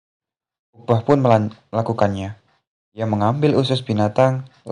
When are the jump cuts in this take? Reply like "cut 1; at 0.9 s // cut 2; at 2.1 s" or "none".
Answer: none